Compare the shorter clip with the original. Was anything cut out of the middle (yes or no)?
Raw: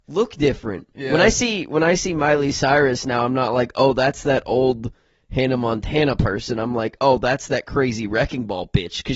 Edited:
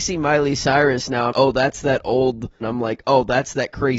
yes